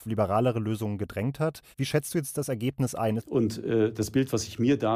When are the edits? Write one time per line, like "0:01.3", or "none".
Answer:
0:01.7
0:03.2